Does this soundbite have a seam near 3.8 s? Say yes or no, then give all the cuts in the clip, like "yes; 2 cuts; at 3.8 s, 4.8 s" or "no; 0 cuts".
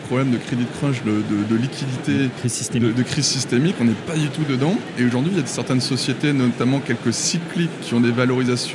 no; 0 cuts